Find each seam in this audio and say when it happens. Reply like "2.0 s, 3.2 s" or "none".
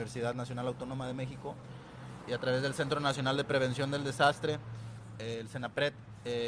none